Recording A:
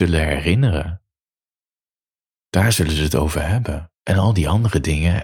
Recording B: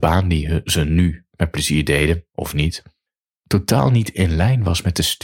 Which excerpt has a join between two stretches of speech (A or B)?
A